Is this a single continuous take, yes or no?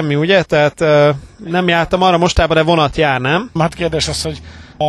no